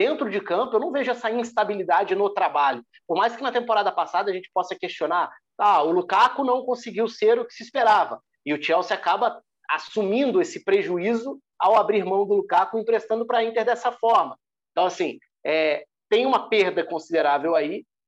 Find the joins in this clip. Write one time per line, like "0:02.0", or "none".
none